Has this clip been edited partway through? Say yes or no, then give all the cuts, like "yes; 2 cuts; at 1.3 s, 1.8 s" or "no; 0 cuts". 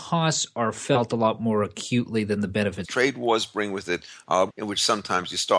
yes; 2 cuts; at 2.8 s, 4.5 s